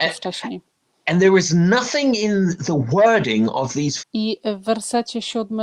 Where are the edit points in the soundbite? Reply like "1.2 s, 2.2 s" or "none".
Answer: 4.0 s